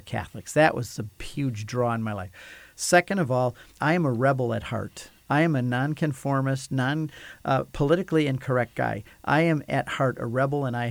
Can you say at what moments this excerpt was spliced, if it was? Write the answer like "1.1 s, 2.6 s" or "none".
3.8 s